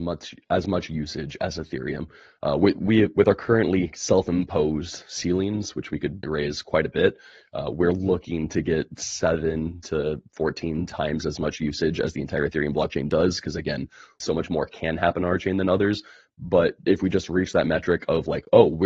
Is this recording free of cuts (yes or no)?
no